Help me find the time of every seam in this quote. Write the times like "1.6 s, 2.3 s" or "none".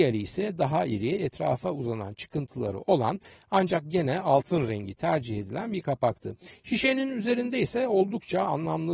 6.6 s